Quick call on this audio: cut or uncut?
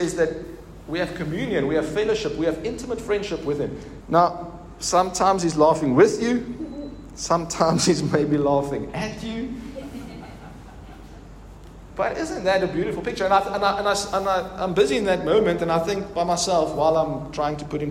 cut